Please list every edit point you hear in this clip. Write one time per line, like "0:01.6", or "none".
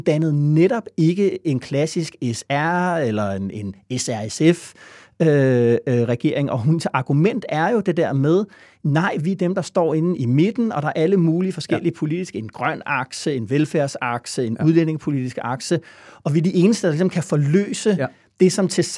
none